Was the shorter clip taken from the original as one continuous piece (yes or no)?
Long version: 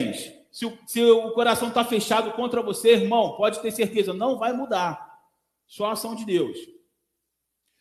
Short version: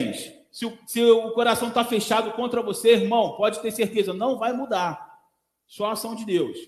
yes